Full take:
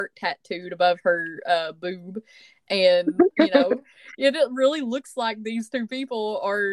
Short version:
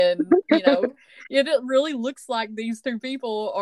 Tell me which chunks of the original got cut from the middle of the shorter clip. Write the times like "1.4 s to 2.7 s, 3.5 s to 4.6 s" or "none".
none